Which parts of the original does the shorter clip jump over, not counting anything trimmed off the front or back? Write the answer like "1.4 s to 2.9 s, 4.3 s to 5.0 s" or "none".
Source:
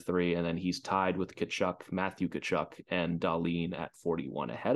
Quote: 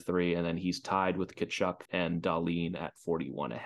1.9 s to 2.8 s